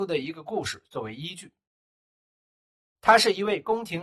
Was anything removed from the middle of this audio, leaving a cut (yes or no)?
no